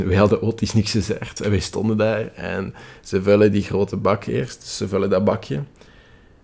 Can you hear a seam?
no; 0 cuts

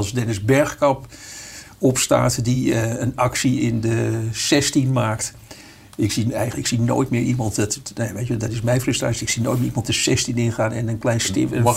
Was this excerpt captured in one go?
yes; 0 cuts

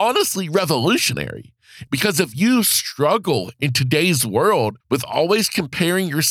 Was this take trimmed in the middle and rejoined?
yes; 2 cuts; at 1.9 s, 4.8 s

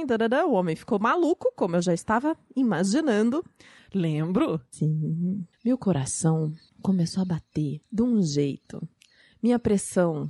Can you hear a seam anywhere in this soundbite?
yes; 1 cut; at 3.8 s

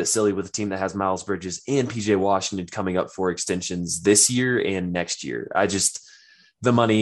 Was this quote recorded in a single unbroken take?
yes; 0 cuts

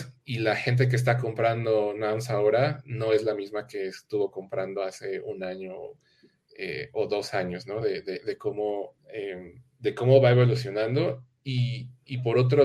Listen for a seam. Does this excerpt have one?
yes; 2 cuts; at 7.8 s, 9.0 s

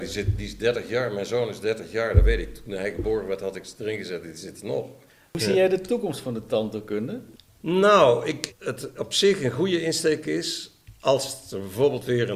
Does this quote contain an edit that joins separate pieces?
yes; 1 cut; at 8.5 s

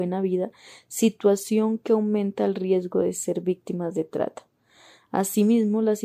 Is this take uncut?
yes; 0 cuts

